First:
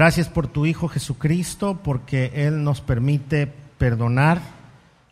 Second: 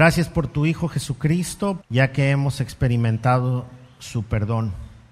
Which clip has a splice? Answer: second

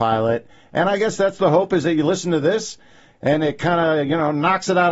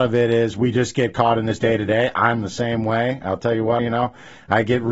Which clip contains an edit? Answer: second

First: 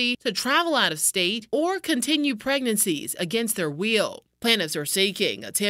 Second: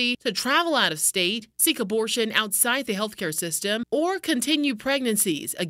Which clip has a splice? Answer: first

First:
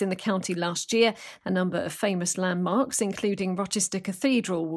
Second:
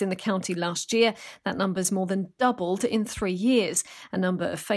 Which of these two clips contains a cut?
first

